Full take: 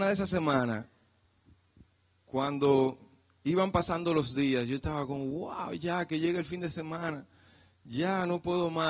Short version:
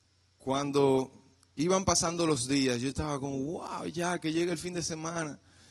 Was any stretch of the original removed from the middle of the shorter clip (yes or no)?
no